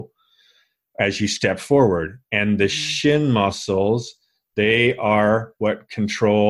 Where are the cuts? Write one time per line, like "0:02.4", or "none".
none